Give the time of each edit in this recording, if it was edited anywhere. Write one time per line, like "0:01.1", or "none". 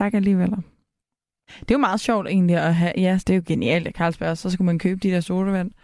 0:01.5
0:03.2